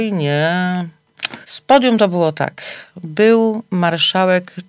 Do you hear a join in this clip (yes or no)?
yes